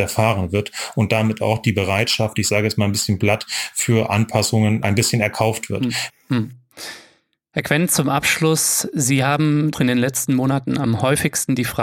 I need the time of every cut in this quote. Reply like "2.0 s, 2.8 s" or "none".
6.1 s, 9.7 s